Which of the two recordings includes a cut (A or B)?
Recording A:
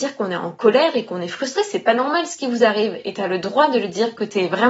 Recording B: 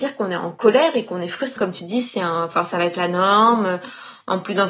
B